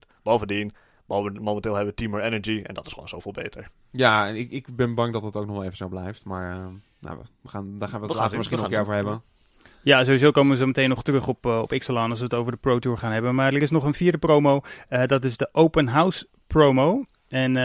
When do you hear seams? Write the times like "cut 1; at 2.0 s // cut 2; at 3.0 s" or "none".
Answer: none